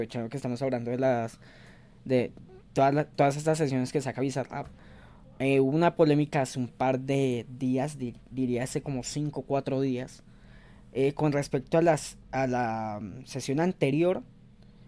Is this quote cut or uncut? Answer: cut